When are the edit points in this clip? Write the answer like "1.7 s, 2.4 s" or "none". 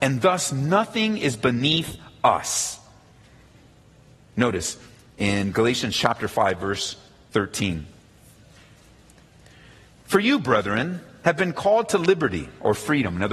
none